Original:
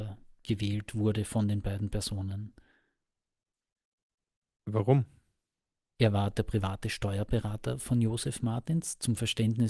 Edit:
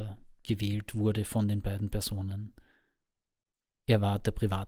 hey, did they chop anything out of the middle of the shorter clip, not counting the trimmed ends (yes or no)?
yes